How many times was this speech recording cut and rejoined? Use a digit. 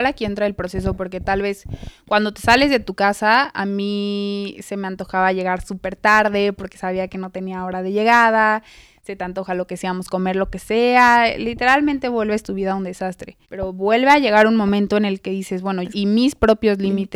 2